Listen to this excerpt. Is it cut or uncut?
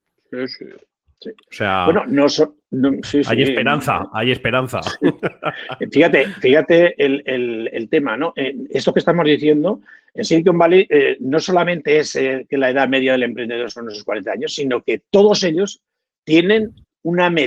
uncut